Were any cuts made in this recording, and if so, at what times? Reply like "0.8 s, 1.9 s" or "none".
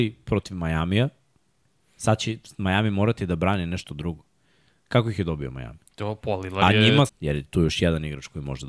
5.8 s, 7.1 s